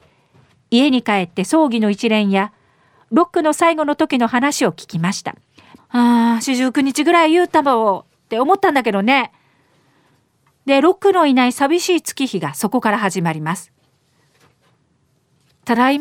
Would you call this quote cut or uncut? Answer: cut